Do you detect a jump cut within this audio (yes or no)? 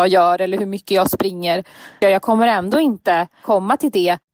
yes